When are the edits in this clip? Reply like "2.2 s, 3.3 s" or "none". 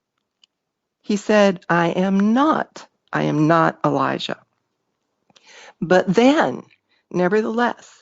3.1 s